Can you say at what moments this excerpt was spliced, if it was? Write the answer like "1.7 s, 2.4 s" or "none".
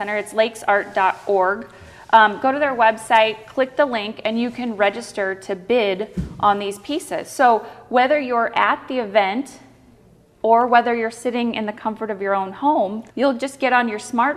13.1 s